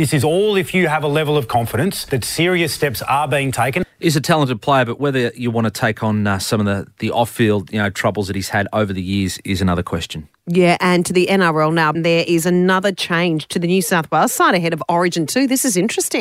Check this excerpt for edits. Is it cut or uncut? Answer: cut